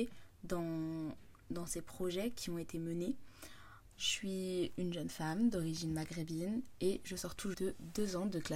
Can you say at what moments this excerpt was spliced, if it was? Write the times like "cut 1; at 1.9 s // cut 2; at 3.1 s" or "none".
cut 1; at 3.9 s // cut 2; at 7.5 s